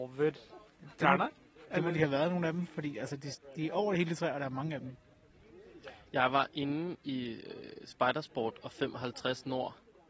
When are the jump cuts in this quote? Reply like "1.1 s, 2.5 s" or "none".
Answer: none